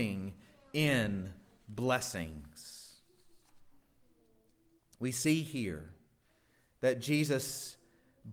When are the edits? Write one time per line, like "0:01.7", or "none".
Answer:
none